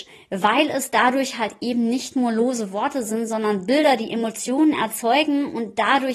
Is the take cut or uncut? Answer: uncut